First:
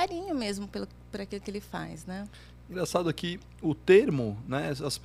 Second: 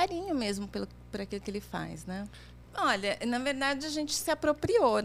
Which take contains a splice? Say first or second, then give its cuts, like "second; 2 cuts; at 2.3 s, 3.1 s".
second; 1 cut; at 2.6 s